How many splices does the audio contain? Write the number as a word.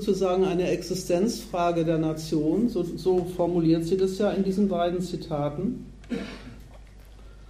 zero